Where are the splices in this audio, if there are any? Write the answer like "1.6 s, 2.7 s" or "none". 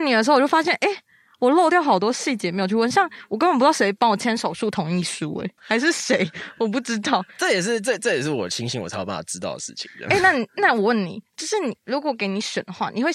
5.6 s